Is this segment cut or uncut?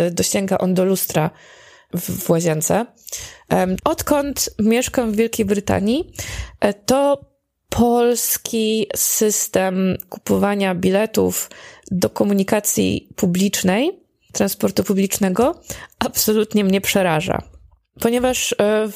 cut